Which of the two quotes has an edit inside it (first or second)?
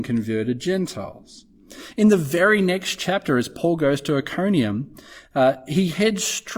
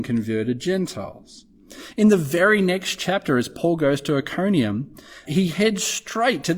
second